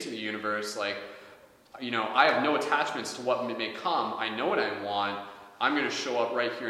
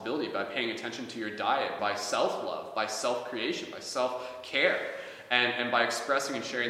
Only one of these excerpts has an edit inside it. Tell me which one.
second; 1 cut; at 1.8 s

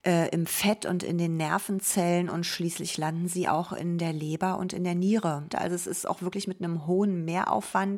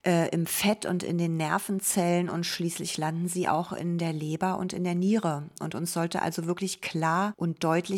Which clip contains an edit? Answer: first; 1 cut; at 5.5 s

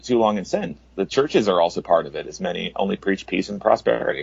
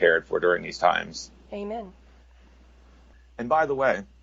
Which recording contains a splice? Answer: second; 1 cut; at 1.5 s

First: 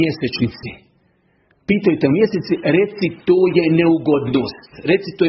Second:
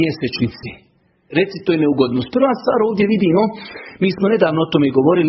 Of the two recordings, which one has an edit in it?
second; 1 cut; at 1.3 s

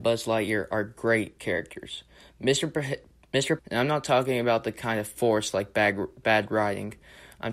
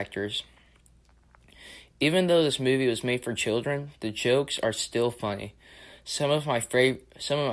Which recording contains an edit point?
first; 2 cuts; at 3.6 s, 6.2 s

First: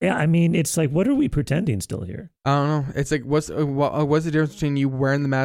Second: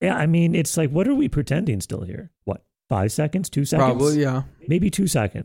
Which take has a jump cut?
second; 1 cut; at 2.4 s

